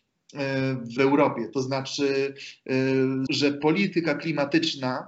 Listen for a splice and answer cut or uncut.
cut